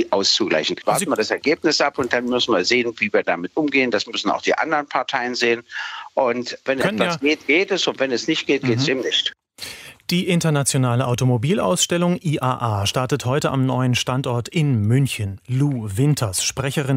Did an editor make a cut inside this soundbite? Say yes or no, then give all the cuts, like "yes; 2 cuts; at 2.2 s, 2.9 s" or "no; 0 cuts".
no; 0 cuts